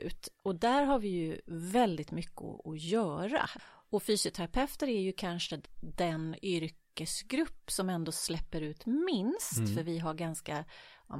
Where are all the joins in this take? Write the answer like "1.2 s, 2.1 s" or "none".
none